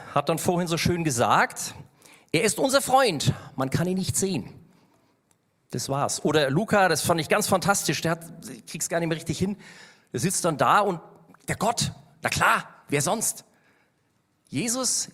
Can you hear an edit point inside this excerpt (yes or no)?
no